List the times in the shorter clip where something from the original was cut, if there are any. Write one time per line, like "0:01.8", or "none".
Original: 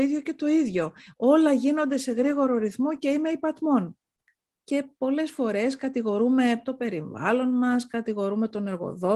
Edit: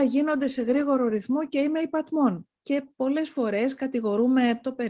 0:02.6

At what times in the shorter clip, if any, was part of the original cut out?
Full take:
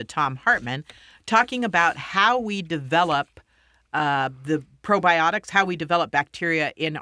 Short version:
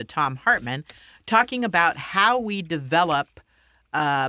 none

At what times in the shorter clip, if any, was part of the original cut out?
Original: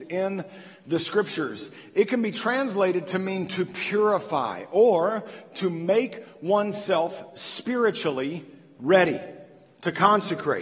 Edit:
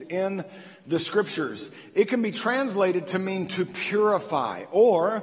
none

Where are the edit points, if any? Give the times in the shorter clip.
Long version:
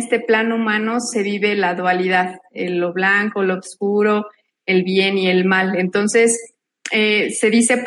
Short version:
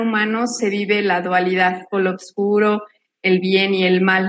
0:01.9

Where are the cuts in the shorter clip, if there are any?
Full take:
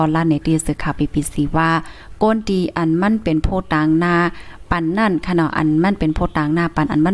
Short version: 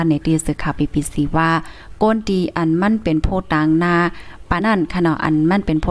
0:04.6

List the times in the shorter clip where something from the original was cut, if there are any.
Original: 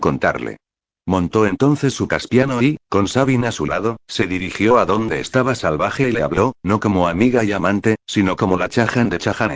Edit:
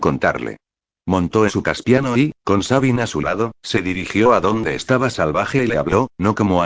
0:01.5

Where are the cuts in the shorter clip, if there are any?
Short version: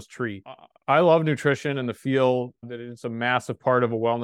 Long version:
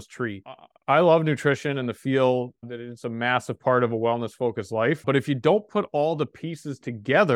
none

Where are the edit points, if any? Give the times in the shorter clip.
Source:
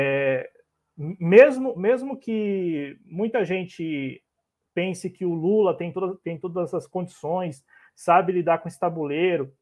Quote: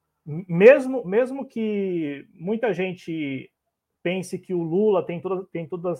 none

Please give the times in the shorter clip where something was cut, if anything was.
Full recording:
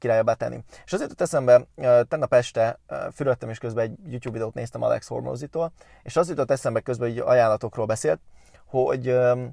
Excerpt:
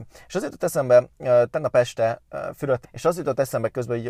0:02.8

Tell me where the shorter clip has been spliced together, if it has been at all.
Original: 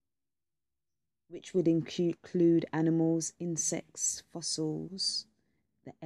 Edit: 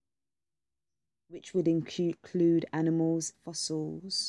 0:03.3

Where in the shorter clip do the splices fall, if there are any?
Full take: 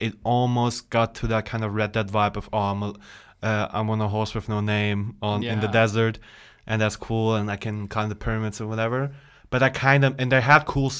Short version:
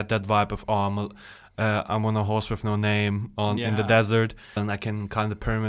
0:04.6

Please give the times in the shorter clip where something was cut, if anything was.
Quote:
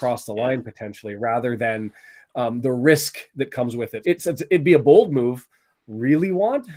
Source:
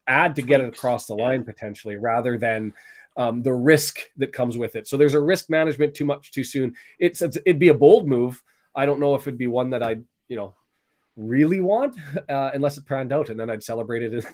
0:04.0
0:05.7

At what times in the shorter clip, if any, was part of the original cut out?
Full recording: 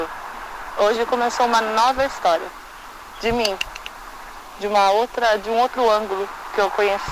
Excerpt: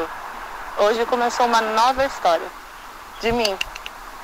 none

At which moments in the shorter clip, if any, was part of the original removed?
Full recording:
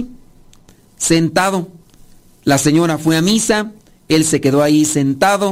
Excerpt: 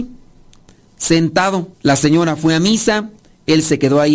0:01.7

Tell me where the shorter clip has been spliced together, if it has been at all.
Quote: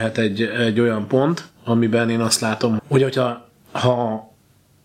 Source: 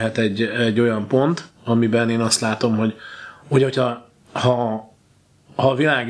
0:02.8

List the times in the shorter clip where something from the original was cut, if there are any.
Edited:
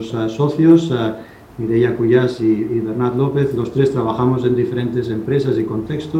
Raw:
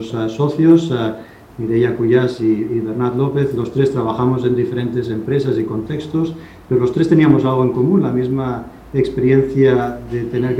none

